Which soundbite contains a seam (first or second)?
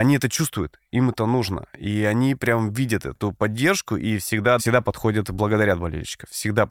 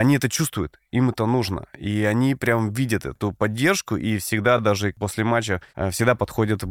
first